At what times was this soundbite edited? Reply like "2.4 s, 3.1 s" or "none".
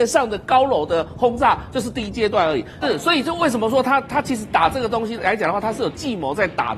2.8 s, 5.2 s